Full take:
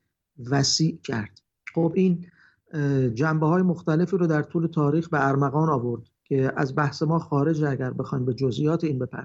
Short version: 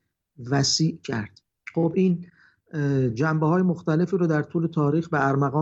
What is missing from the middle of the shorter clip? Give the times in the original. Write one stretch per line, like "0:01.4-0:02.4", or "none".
none